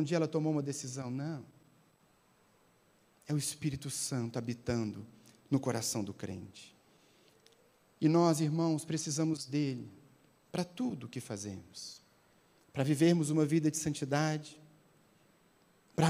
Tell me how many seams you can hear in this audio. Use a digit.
0